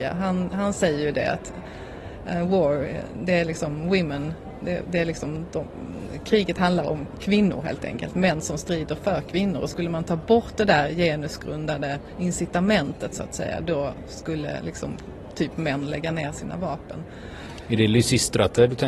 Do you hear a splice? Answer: no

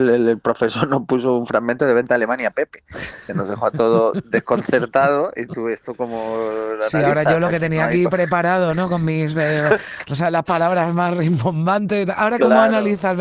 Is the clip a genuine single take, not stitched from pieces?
yes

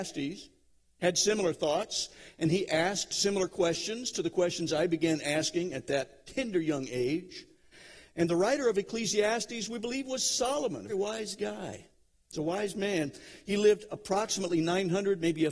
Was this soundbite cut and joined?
yes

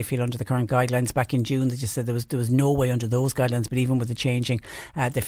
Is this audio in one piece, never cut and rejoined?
yes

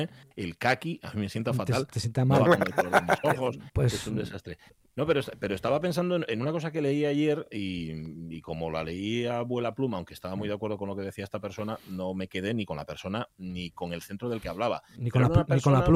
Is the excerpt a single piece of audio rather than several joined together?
yes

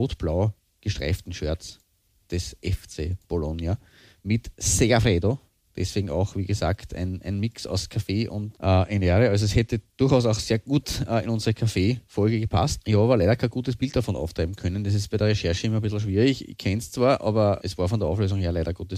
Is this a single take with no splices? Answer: no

